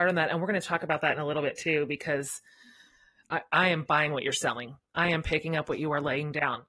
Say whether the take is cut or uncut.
uncut